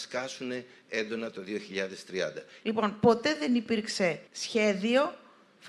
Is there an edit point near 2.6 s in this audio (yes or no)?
yes